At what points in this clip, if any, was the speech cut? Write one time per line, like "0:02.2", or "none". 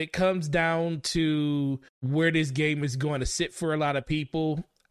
0:01.9